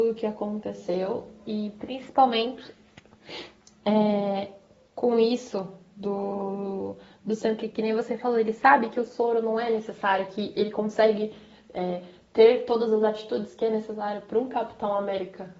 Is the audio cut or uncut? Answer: uncut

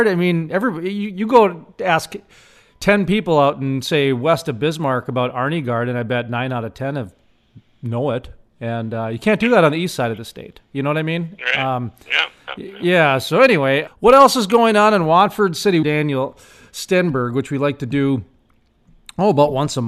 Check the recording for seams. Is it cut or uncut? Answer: cut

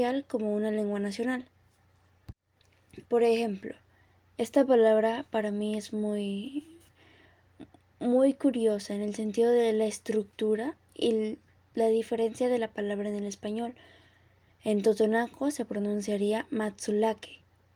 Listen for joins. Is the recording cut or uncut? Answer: cut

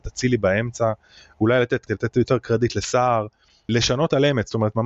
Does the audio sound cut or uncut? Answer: cut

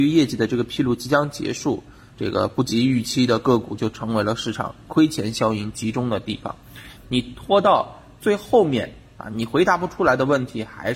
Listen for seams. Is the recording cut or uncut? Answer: cut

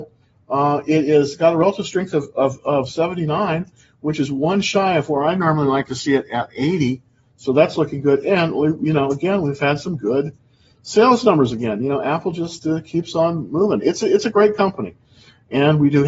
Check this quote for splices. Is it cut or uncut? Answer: uncut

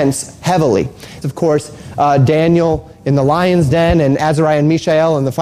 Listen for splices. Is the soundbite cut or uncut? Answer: cut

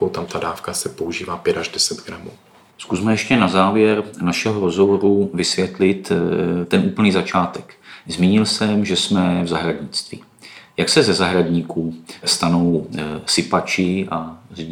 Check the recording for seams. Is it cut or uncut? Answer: uncut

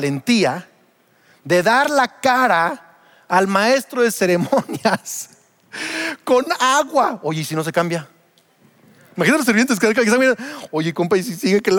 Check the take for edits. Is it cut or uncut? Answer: uncut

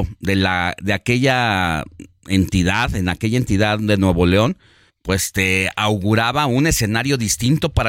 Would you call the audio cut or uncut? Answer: cut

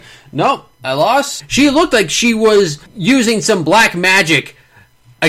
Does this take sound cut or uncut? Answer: cut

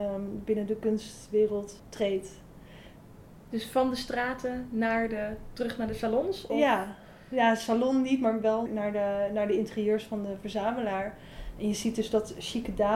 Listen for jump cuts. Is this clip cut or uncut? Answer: cut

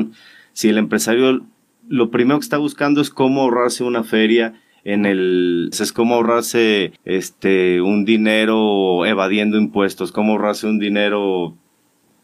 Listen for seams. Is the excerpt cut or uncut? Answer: cut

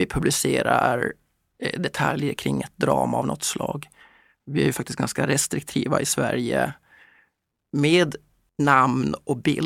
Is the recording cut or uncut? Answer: uncut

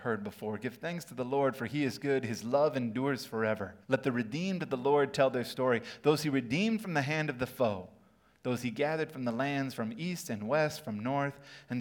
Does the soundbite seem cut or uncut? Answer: cut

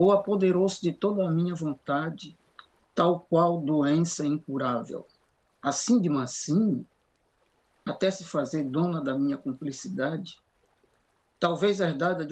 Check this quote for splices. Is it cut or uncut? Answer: uncut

